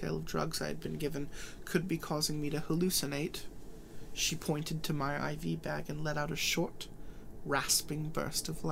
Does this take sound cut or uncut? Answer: uncut